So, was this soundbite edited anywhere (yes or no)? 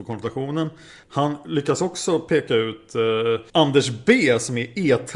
yes